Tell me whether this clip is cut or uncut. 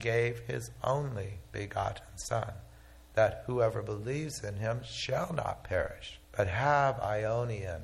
cut